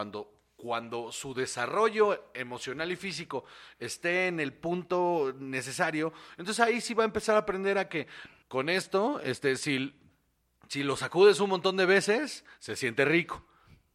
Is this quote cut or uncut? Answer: cut